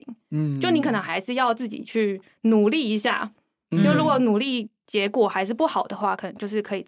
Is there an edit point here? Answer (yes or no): no